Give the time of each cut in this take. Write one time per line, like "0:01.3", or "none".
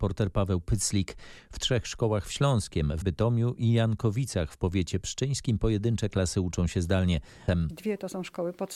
0:03.0
0:07.5